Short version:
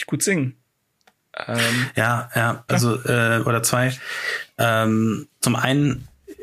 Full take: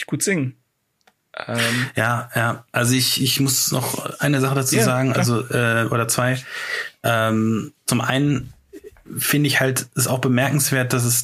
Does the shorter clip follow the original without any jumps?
no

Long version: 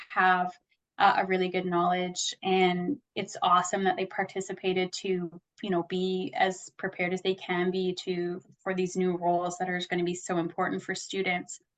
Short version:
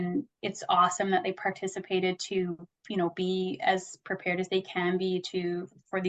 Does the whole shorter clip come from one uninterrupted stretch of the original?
yes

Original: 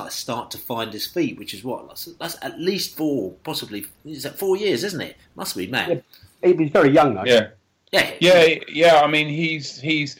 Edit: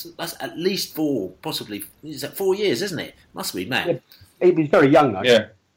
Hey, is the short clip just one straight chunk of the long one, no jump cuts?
yes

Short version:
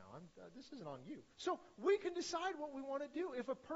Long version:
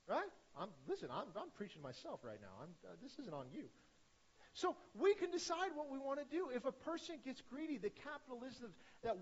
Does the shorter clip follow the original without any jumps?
no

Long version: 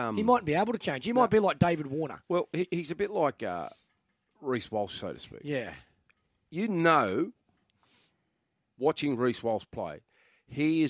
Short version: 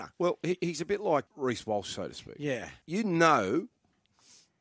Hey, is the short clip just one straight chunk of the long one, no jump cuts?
no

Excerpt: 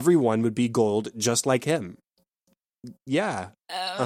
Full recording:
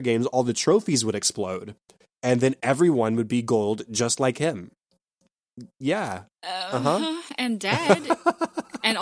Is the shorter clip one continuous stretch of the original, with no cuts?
yes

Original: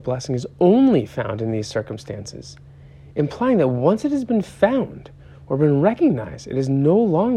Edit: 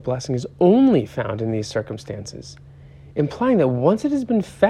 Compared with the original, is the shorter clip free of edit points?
yes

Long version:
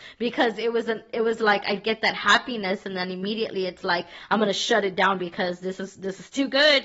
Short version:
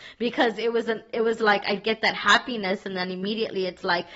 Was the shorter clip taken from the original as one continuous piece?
yes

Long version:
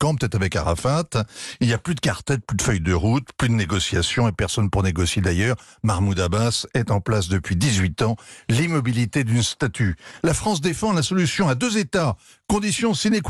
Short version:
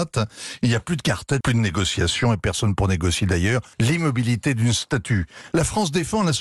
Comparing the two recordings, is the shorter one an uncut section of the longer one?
no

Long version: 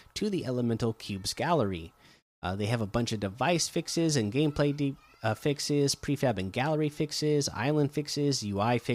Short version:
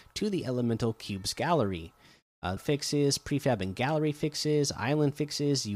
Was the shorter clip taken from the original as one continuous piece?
no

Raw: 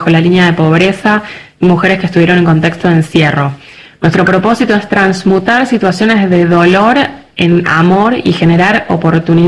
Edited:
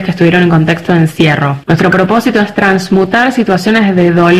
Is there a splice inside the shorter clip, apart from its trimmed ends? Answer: yes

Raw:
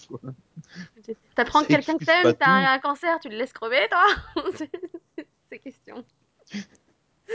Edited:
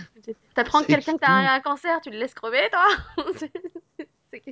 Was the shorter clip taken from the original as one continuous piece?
no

